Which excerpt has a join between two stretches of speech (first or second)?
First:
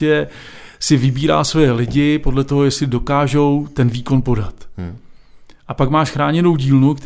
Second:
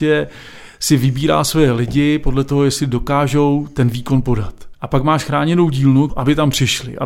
second